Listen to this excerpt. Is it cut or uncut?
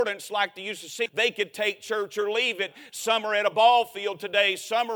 cut